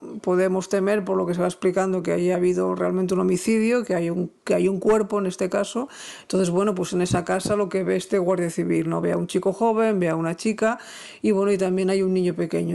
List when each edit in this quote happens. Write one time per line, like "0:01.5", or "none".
none